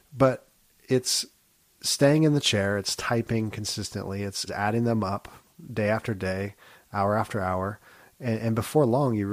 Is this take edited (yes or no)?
yes